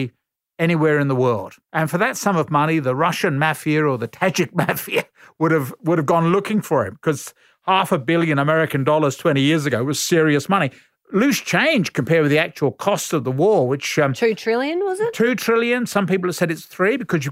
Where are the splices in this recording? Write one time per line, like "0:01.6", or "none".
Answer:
0:01.6